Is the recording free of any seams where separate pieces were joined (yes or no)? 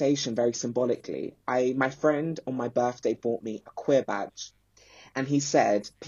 yes